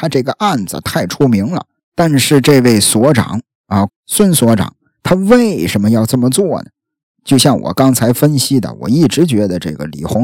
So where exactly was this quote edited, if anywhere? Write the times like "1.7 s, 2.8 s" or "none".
1.8 s, 3.9 s, 7.0 s

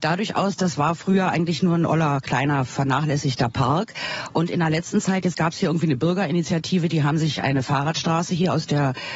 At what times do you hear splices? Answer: 5.3 s

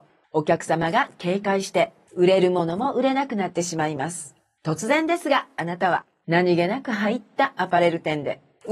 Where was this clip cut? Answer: none

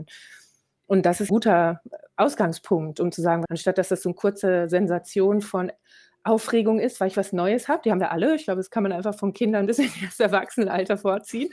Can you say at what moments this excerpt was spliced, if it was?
1.3 s, 3.5 s

